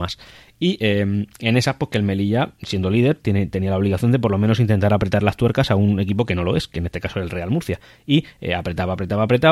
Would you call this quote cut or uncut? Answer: uncut